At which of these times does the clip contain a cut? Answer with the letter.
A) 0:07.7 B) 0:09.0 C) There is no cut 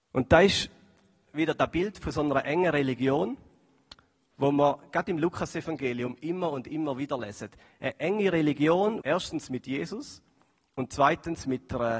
B